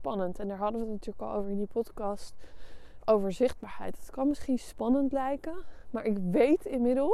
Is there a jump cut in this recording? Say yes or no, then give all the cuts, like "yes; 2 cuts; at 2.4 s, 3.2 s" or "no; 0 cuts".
no; 0 cuts